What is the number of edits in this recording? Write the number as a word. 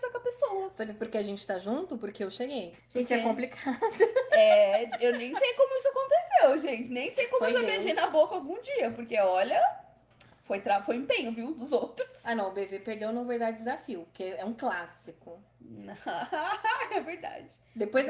one